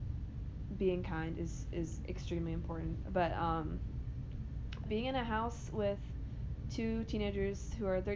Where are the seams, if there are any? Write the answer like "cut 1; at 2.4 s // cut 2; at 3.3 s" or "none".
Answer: cut 1; at 3.0 s // cut 2; at 4.9 s